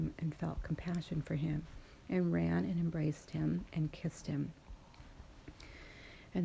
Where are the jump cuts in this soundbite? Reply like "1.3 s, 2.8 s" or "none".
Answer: none